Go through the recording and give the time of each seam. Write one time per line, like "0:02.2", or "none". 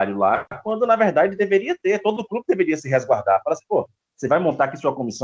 none